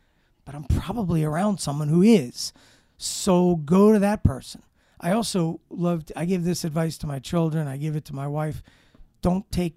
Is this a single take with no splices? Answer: yes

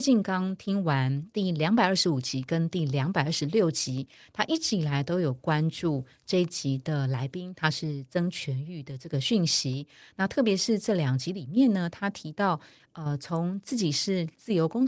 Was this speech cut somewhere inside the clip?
no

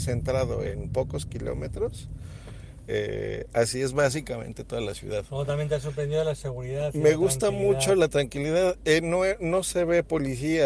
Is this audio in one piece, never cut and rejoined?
yes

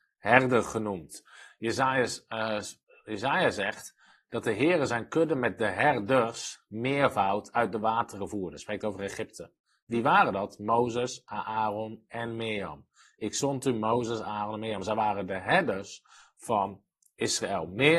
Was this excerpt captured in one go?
yes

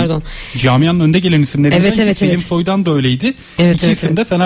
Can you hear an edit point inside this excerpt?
no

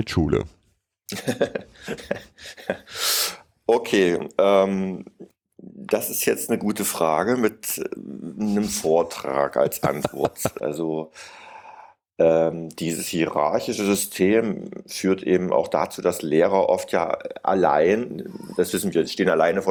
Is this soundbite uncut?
no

